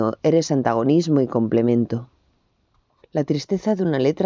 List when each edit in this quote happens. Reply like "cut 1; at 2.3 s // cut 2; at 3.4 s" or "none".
cut 1; at 3.0 s